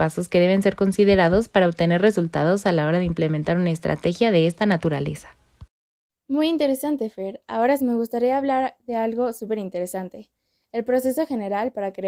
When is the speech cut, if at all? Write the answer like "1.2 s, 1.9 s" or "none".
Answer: 7.8 s